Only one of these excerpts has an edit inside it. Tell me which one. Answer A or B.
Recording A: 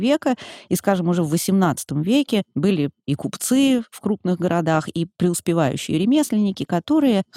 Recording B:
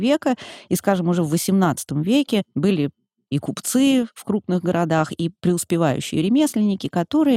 A